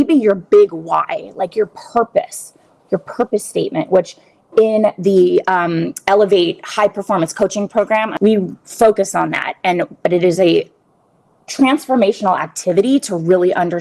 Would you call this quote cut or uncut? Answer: uncut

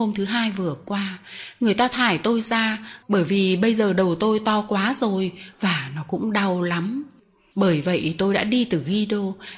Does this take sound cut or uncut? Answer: cut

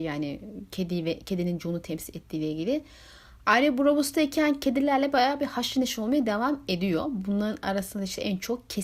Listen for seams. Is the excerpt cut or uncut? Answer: uncut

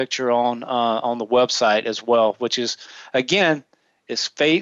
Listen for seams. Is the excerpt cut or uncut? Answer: uncut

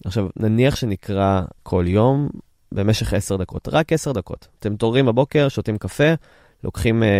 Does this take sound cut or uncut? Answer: cut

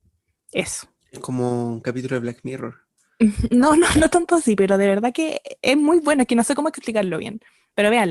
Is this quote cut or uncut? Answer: uncut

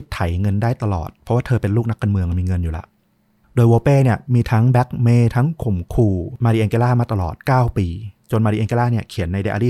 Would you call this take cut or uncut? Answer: uncut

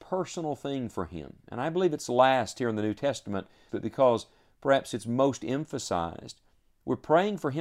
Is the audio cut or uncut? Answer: cut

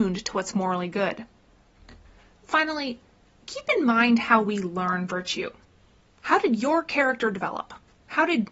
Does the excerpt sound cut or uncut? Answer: uncut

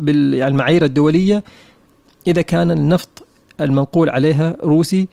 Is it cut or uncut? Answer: uncut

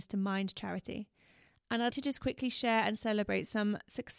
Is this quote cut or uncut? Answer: cut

